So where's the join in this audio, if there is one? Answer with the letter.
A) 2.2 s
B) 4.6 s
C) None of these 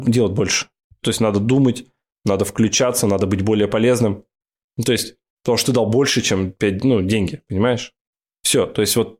B